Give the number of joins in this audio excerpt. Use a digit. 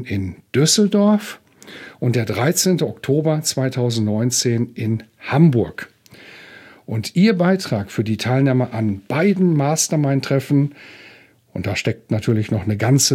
0